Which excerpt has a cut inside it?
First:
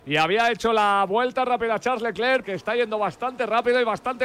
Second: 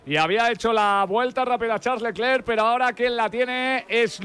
first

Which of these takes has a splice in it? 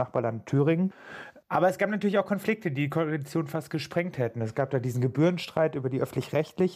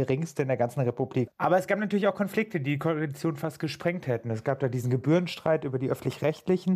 second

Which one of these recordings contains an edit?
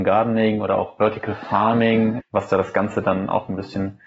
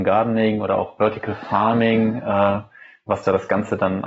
first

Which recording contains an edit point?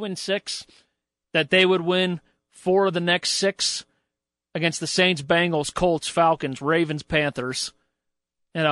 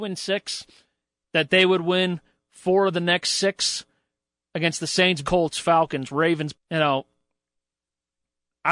second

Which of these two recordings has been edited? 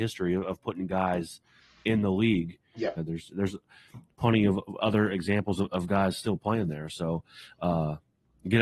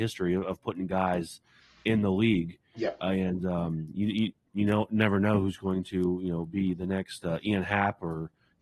first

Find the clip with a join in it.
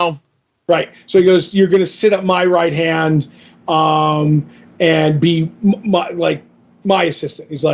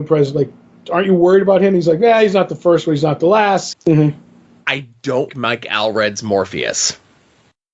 second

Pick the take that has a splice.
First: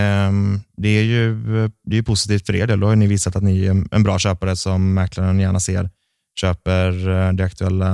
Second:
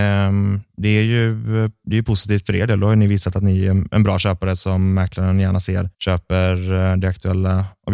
second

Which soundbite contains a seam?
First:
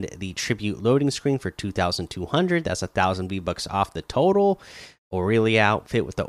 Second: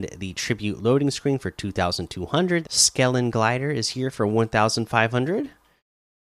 second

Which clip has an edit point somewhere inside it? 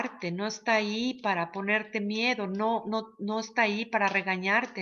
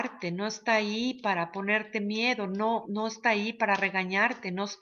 second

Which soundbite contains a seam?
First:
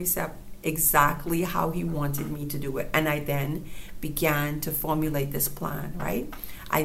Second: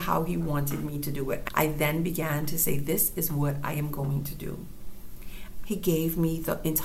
second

